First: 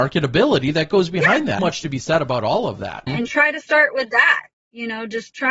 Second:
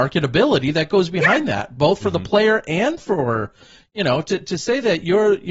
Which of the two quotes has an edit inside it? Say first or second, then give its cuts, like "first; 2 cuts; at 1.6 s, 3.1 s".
first; 2 cuts; at 1.6 s, 3.1 s